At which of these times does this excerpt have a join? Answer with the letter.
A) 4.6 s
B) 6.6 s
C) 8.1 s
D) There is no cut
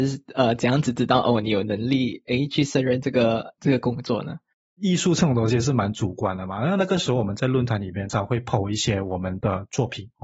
C